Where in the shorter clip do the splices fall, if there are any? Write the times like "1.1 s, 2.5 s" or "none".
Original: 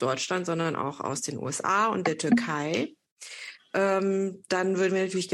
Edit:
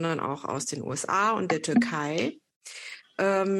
none